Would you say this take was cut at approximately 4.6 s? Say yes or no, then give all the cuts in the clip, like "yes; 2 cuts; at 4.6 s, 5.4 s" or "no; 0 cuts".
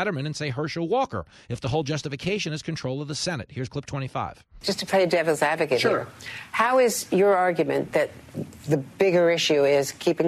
no; 0 cuts